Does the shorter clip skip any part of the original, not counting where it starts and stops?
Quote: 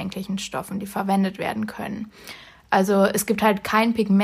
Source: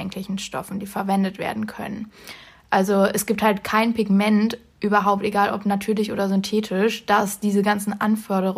no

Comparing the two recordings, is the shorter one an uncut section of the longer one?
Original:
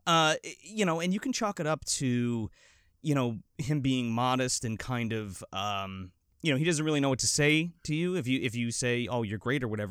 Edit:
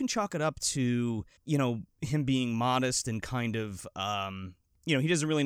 no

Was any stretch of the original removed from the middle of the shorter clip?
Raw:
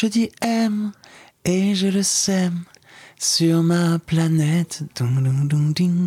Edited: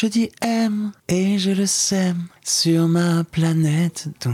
yes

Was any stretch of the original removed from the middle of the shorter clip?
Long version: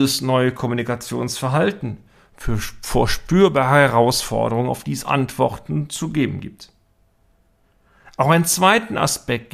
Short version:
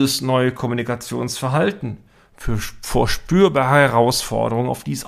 no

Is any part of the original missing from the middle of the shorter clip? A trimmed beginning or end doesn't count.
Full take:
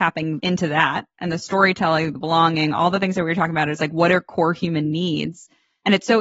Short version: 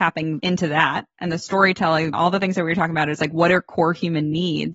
yes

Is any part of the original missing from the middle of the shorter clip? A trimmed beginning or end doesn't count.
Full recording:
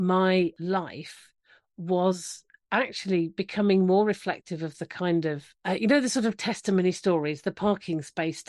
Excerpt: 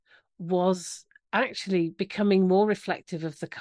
no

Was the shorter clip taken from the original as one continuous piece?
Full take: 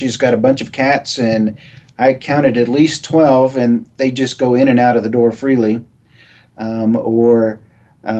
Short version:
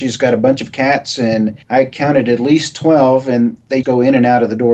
no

